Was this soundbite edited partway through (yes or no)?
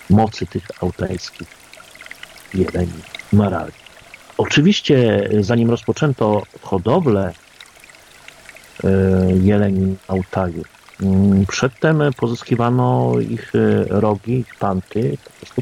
no